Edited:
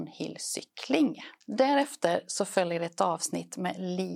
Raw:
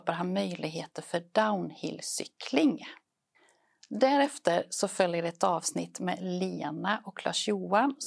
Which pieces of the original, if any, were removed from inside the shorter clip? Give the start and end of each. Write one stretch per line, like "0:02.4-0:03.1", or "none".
0:03.0-0:03.8